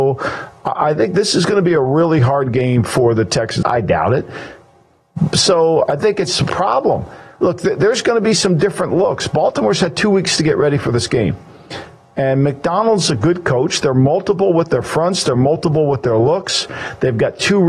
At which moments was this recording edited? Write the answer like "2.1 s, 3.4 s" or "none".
3.6 s